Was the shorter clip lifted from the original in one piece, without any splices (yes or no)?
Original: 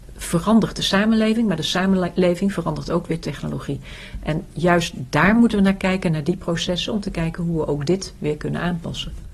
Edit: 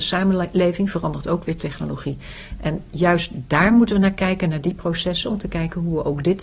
yes